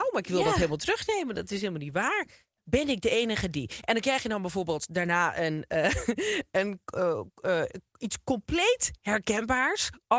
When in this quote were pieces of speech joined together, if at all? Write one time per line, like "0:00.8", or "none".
none